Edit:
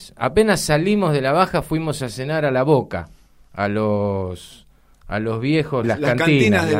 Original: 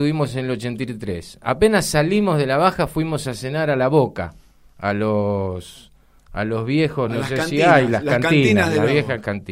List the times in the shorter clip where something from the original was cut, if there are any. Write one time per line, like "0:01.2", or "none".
0:05.8